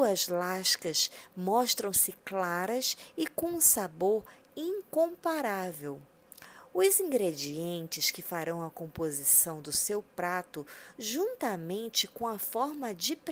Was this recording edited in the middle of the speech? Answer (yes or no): no